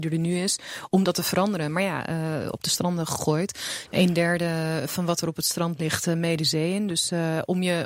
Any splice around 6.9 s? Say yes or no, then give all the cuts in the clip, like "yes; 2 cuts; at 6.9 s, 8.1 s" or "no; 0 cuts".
no; 2 cuts; at 2.5 s, 3.9 s